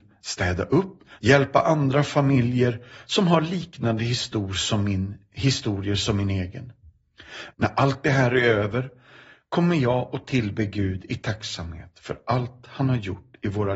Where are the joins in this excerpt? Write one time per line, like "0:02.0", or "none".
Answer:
0:01.1
0:07.5